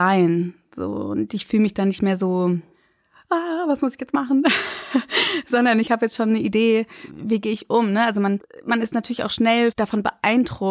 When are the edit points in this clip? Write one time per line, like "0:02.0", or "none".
none